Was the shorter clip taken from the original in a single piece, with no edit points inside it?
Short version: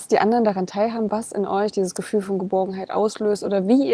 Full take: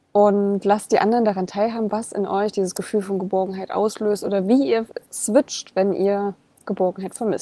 yes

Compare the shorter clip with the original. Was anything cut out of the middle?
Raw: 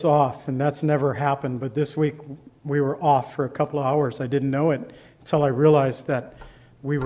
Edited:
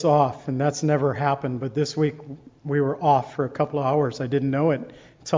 no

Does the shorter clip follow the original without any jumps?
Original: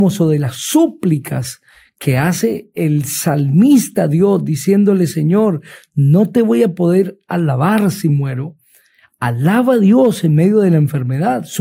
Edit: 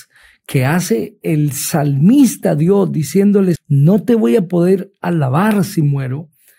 no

